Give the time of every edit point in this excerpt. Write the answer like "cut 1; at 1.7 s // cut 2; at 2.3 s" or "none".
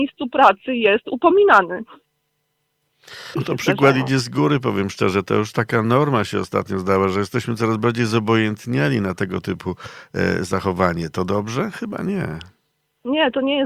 cut 1; at 3.3 s